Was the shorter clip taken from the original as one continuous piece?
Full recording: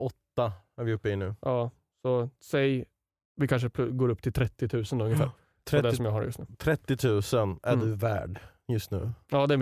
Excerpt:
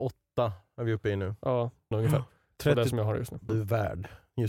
no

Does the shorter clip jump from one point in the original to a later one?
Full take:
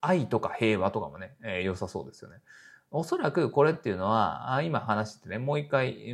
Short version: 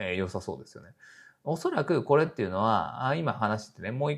no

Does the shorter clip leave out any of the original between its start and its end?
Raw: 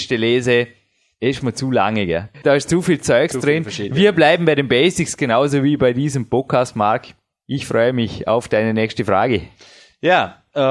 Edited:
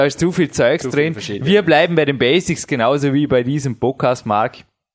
no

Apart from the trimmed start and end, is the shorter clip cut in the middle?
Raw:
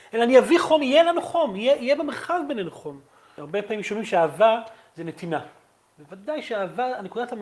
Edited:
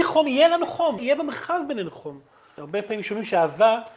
yes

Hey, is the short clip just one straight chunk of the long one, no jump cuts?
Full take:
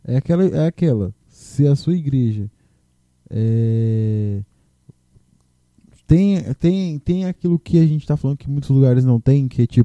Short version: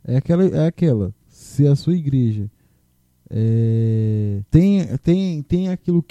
no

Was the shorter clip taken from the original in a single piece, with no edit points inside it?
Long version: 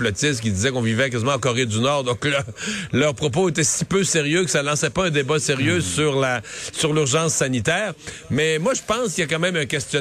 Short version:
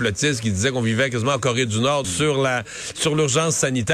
no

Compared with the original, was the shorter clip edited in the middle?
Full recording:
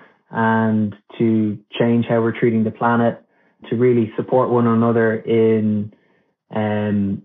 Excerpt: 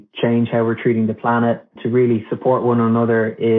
yes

